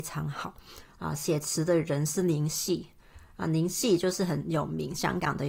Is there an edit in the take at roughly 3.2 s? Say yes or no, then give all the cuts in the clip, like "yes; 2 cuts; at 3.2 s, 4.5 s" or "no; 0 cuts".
no; 0 cuts